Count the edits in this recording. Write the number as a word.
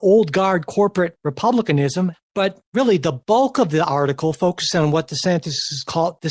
one